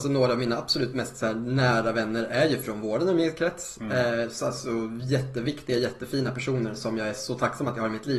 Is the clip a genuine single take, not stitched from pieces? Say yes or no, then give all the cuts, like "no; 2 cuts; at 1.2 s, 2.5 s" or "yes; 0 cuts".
yes; 0 cuts